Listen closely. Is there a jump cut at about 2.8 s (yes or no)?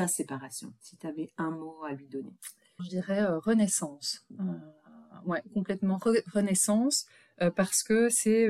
yes